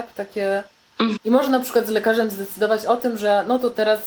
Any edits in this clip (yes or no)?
yes